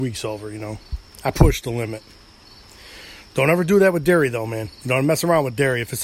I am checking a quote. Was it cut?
no; 0 cuts

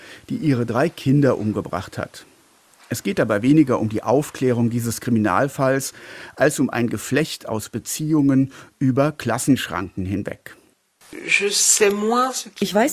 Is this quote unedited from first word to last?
yes; 0 cuts

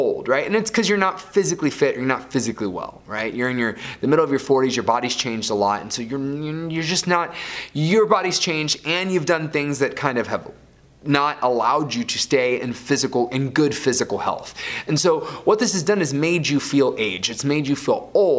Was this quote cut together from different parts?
no; 0 cuts

